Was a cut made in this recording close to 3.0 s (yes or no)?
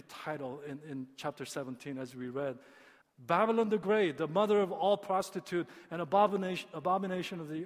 yes